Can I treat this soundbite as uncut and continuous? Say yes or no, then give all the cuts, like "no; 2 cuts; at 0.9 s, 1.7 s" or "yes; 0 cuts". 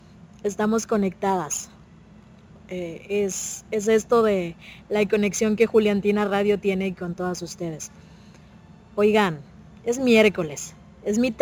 yes; 0 cuts